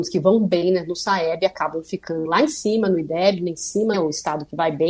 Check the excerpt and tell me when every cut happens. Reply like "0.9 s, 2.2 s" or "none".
3.9 s